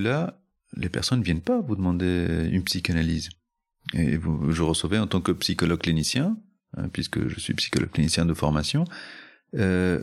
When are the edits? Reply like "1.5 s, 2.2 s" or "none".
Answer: none